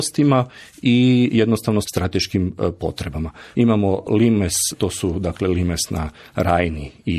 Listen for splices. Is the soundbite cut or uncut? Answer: cut